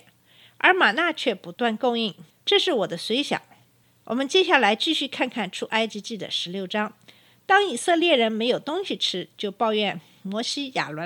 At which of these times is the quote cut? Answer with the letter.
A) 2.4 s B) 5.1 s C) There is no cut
A